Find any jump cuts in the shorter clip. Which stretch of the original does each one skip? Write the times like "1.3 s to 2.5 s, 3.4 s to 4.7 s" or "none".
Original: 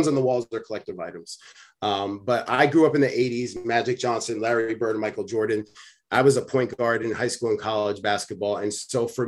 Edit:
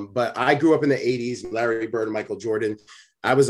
3.6 s to 4.4 s